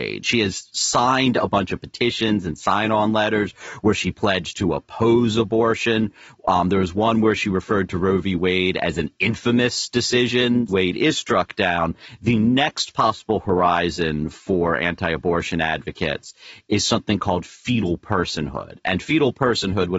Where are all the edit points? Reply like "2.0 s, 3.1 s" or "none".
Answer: 10.7 s